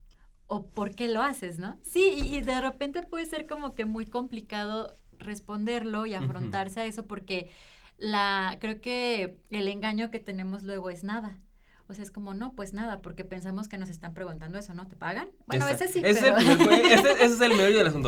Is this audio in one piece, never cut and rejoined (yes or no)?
yes